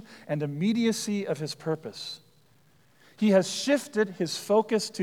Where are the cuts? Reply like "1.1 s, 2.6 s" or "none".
none